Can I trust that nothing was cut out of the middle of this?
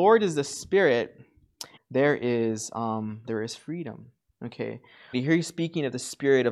no; 2 cuts; at 1.8 s, 5.1 s

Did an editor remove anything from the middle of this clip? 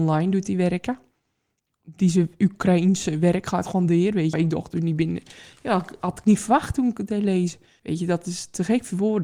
yes; 2 cuts; at 4.3 s, 7.8 s

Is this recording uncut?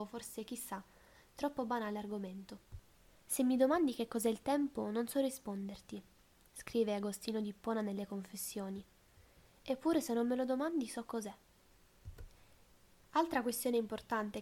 no; 1 cut; at 13.0 s

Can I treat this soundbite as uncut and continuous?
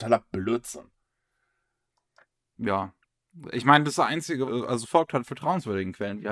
no; 1 cut; at 4.5 s

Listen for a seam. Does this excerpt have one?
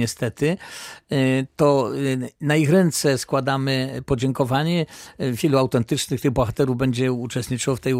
no; 0 cuts

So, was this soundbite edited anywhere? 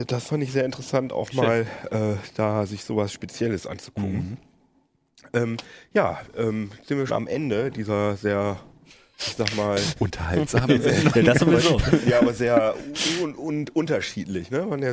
yes; 1 cut; at 7.1 s

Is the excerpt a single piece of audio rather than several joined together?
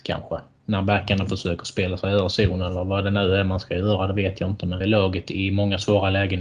no; 1 cut; at 4.8 s

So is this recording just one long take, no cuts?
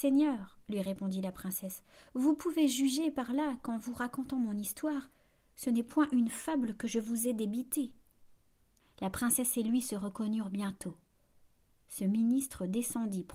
no; 1 cut; at 8.8 s

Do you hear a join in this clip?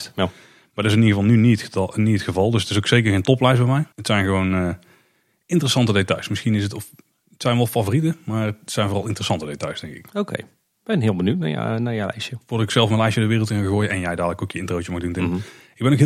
yes; 1 cut; at 3.9 s

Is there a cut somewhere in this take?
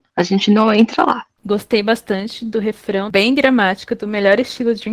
yes; 2 cuts; at 1.4 s, 3.1 s

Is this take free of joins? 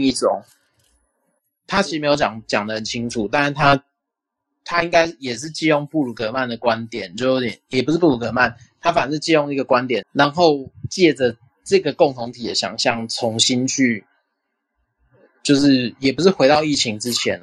no; 1 cut; at 10.0 s

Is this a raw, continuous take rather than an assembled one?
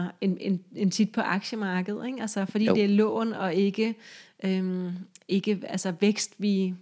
yes; 0 cuts

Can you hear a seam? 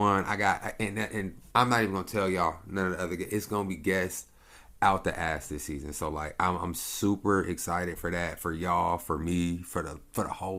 no; 0 cuts

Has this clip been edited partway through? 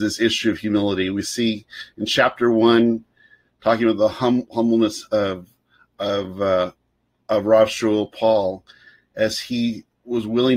no; 0 cuts

